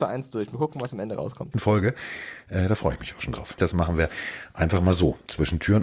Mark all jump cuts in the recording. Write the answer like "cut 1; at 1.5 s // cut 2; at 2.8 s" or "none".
cut 1; at 1.5 s // cut 2; at 3.6 s